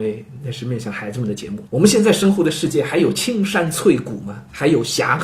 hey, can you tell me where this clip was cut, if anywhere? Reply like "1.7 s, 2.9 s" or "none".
1.7 s